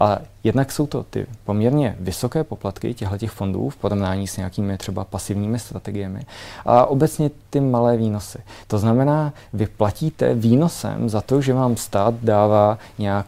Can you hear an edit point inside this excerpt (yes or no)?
no